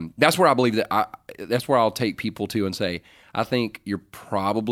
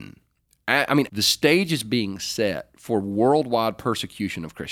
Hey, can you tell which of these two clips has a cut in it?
second; 1 cut; at 1.1 s

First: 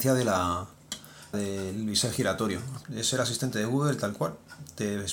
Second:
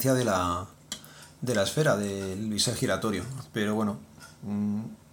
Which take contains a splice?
first; 2 cuts; at 1.3 s, 2.8 s

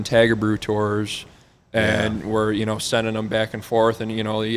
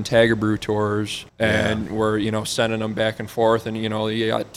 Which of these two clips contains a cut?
second; 1 cut; at 1.3 s

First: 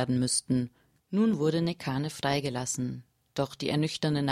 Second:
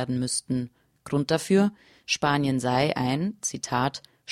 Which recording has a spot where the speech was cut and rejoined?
first; 1 cut; at 1.0 s

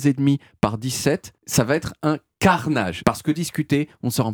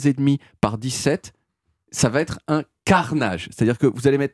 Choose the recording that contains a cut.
first; 2 cuts; at 1.4 s, 3.0 s

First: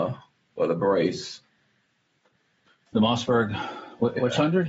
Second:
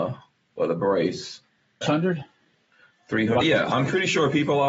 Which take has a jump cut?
second; 2 cuts; at 1.8 s, 3.4 s

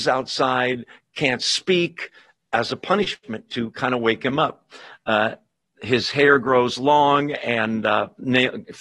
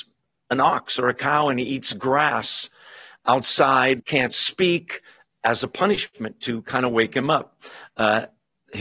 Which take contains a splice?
second; 1 cut; at 4.0 s

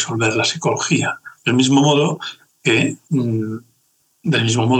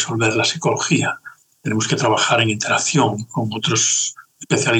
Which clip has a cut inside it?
first; 2 cuts; at 1.4 s, 3.0 s

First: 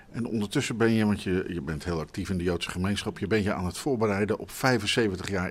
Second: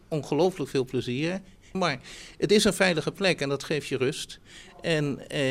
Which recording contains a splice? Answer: second; 1 cut; at 1.7 s

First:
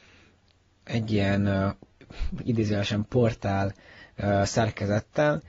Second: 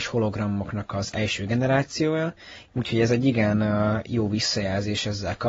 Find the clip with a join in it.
second; 1 cut; at 2.7 s

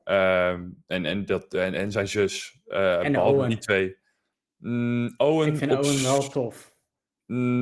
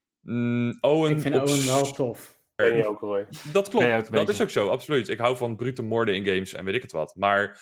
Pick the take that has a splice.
second; 1 cut; at 2.6 s

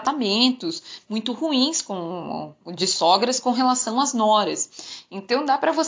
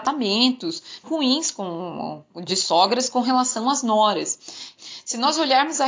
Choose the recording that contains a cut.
second; 2 cuts; at 1.0 s, 4.8 s

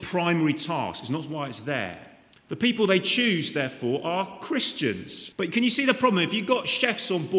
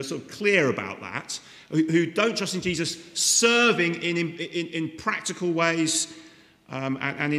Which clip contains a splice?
first; 2 cuts; at 2.3 s, 5.3 s

